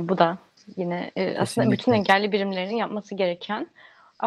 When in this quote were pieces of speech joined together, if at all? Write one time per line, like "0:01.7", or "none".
none